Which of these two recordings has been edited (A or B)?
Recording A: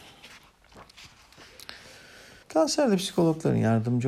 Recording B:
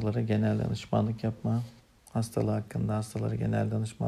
A